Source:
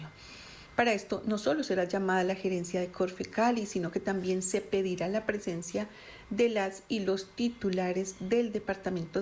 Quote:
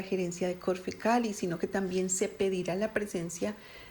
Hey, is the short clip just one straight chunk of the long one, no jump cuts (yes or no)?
yes